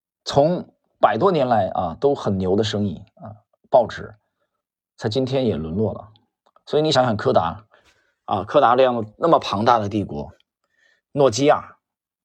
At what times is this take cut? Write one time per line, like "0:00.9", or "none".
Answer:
none

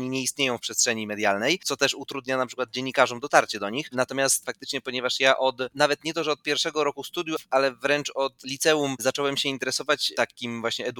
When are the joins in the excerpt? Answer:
none

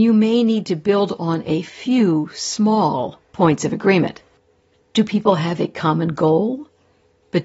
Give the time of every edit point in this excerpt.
0:03.2

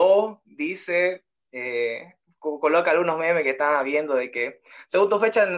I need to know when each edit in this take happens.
none

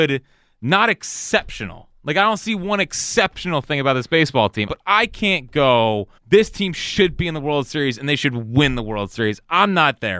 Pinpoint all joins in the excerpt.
0:04.7
0:06.2

